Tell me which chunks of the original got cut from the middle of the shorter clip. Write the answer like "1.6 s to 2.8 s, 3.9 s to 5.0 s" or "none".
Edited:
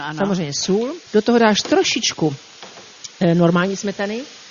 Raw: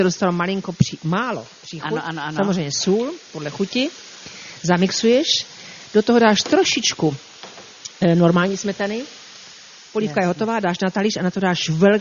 3.3 s to 5.9 s